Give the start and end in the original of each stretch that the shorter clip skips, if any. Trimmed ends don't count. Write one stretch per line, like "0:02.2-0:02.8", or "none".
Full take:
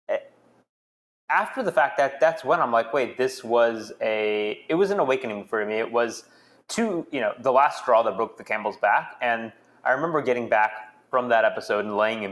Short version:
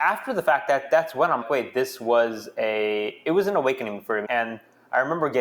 0:02.7-0:02.8
0:05.7-0:09.2